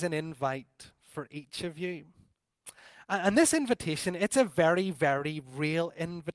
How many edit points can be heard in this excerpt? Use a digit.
0